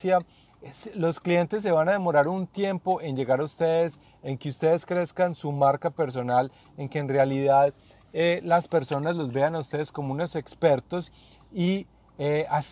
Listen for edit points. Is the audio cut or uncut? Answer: uncut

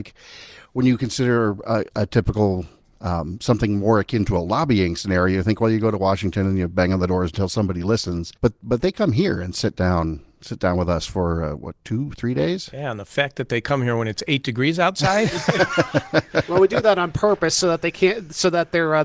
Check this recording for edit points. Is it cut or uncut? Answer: cut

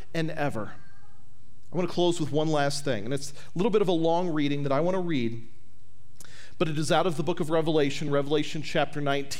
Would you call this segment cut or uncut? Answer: uncut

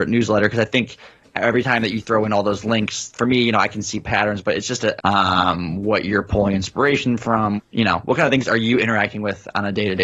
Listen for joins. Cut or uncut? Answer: cut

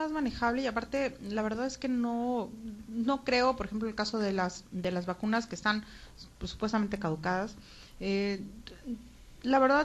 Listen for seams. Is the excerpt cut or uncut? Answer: uncut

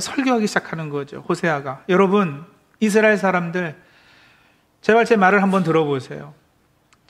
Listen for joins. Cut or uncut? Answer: uncut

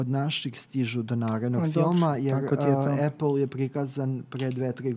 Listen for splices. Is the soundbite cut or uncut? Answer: uncut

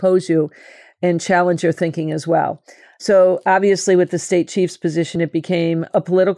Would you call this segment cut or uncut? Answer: uncut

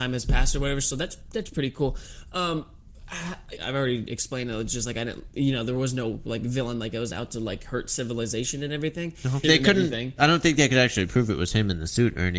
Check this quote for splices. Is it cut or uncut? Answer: cut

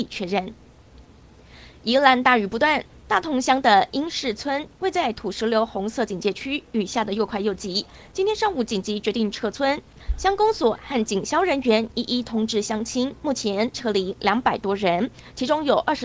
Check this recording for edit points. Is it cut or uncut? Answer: uncut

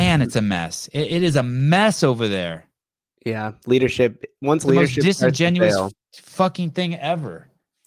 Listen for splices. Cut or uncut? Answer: uncut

